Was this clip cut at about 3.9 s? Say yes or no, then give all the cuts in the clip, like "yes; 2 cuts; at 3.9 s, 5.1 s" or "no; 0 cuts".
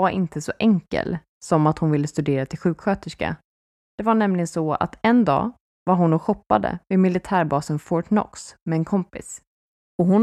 no; 0 cuts